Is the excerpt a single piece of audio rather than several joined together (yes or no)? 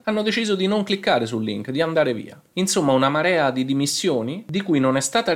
yes